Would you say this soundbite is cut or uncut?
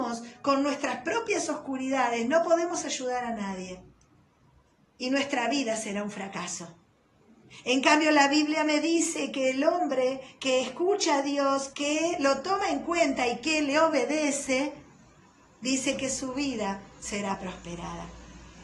cut